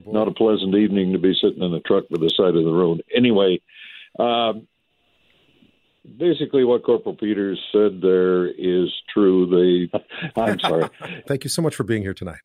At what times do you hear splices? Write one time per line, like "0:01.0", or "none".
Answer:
0:09.9
0:11.2